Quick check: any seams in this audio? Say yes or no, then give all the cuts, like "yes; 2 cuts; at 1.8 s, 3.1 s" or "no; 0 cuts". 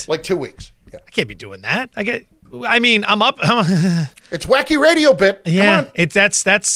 no; 0 cuts